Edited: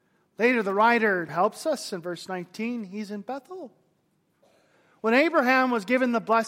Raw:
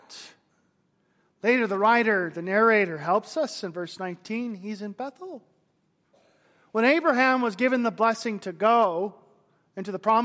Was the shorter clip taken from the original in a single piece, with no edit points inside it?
no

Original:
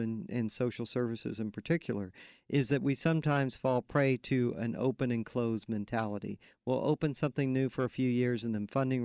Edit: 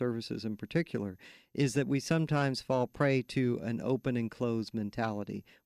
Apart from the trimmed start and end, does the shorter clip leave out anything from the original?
no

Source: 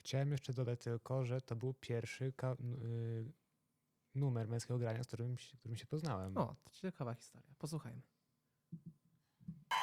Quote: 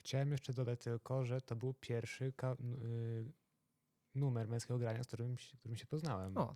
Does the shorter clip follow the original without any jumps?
yes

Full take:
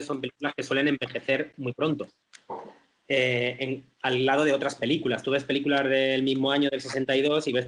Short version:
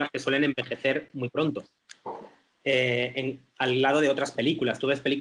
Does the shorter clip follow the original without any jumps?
yes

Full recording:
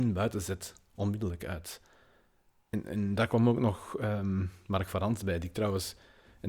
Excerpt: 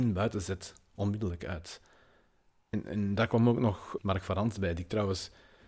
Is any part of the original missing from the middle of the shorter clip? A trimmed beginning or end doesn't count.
yes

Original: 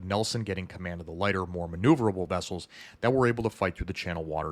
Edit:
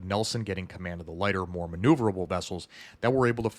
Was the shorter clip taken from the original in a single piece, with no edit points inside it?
yes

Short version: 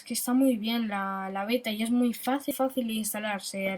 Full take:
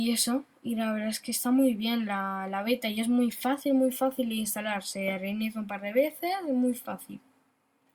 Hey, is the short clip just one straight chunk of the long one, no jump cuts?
no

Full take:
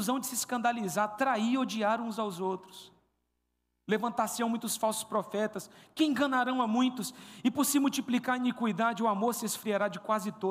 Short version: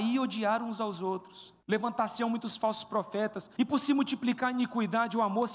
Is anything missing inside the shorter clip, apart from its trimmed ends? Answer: yes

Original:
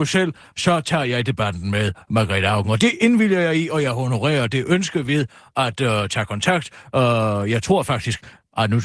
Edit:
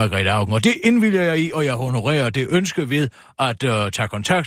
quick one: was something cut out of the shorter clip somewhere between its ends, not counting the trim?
no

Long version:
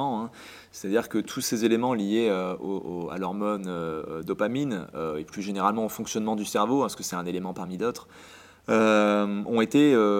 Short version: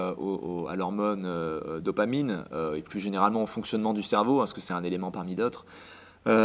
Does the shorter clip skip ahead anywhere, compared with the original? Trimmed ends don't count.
no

